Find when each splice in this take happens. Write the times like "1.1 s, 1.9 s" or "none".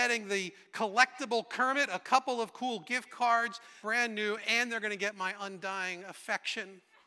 3.8 s